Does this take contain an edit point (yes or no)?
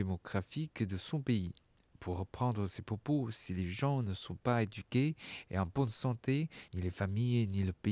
no